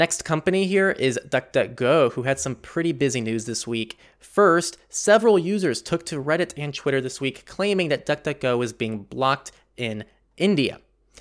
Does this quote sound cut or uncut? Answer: uncut